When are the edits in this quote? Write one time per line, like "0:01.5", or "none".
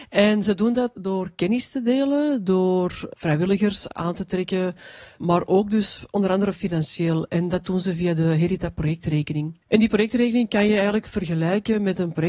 0:09.6